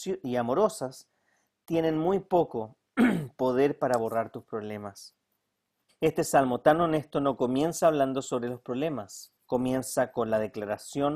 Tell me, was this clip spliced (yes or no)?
yes